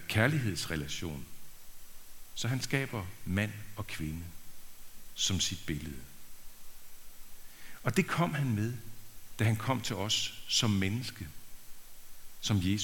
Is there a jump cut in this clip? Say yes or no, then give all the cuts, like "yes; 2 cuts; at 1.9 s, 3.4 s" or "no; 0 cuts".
no; 0 cuts